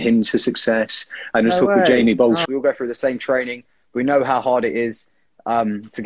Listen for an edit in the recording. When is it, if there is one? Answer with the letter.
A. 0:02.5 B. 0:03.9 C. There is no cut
A